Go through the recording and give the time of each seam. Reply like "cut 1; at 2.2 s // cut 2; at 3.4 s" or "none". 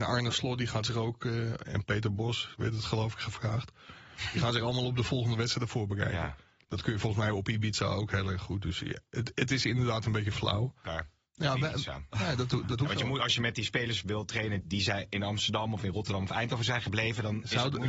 cut 1; at 10.8 s // cut 2; at 14.6 s

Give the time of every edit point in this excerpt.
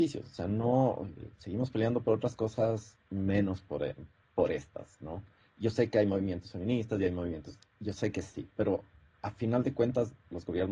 none

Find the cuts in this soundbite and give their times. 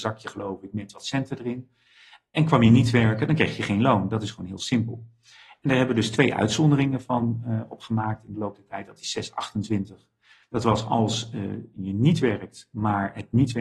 none

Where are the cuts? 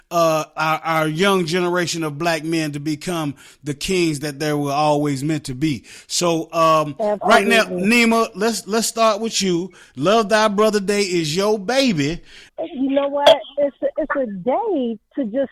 cut 1; at 12.5 s

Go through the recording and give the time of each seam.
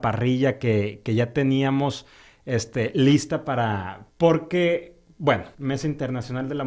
cut 1; at 4.1 s // cut 2; at 5.5 s

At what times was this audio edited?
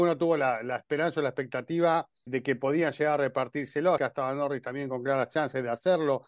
cut 1; at 2.3 s // cut 2; at 4.0 s

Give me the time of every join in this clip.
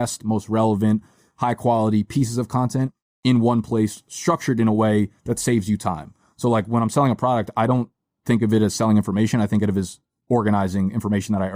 none

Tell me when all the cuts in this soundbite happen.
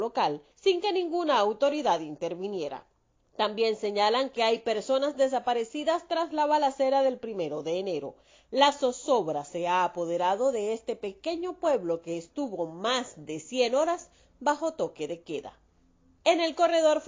none

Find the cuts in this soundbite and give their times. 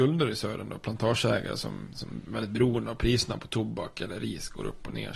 none

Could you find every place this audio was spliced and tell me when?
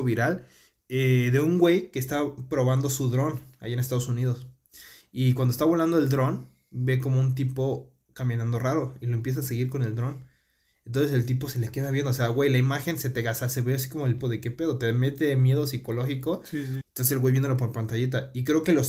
cut 1; at 14.2 s // cut 2; at 16.8 s

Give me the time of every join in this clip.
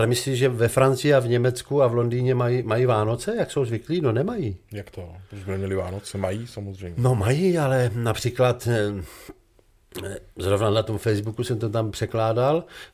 none

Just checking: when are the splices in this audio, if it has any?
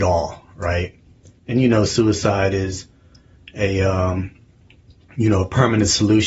none

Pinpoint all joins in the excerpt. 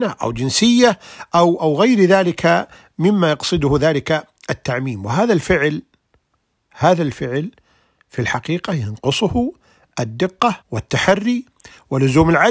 cut 1; at 1.6 s // cut 2; at 10.6 s

